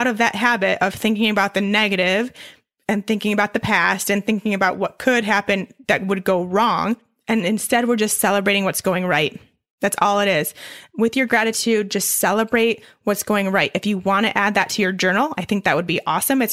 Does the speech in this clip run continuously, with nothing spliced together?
yes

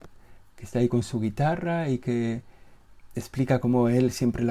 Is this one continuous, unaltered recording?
yes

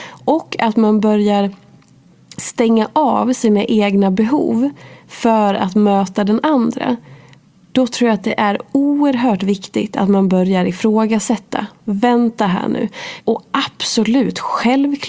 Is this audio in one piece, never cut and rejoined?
no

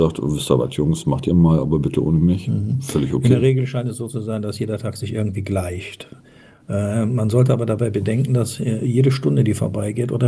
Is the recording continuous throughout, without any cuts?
yes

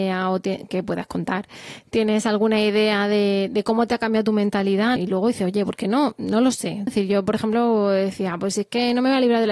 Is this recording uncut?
no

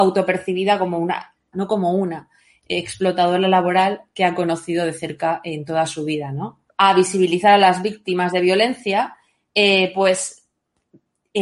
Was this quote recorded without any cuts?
no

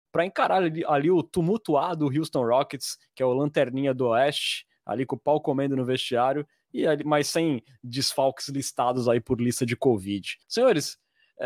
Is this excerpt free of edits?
no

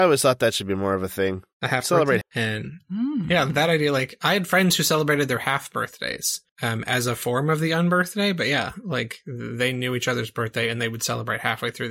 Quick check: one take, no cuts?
no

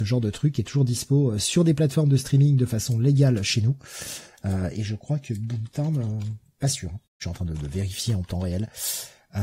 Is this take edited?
yes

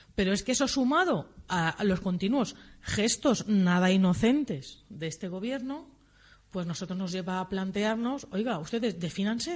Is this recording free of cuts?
yes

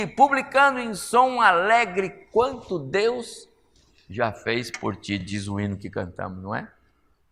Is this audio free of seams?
yes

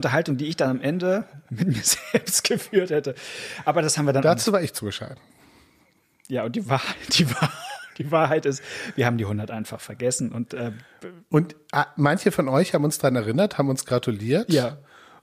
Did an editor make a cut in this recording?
no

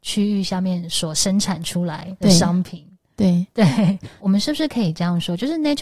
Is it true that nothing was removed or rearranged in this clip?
yes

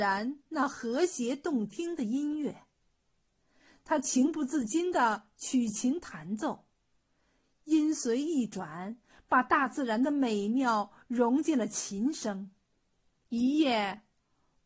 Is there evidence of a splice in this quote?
yes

